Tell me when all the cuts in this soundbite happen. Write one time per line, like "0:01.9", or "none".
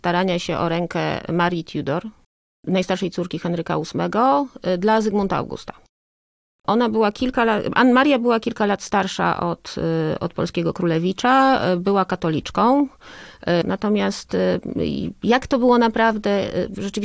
0:13.6